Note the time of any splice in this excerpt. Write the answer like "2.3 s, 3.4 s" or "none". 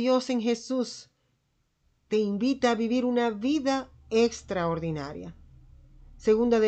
none